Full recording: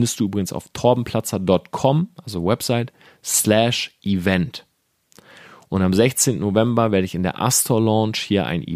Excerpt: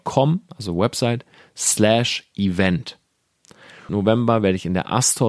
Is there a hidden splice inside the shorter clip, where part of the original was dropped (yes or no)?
yes